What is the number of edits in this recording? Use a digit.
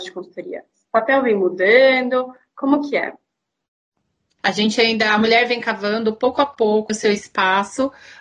2